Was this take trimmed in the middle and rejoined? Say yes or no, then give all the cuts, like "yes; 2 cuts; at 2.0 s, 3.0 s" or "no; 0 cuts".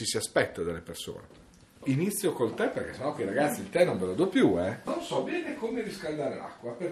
no; 0 cuts